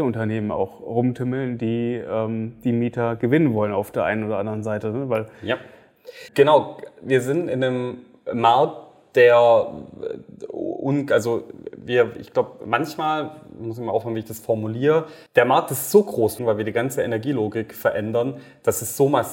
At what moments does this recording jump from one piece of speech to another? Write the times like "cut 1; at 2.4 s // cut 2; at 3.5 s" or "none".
cut 1; at 6.3 s // cut 2; at 15.3 s // cut 3; at 16.4 s